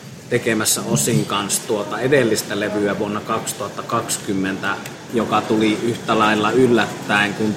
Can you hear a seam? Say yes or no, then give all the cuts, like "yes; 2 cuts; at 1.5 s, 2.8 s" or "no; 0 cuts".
yes; 1 cut; at 5.1 s